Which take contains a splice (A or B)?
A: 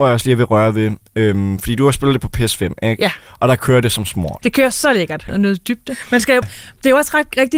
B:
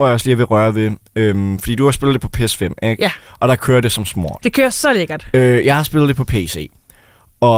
A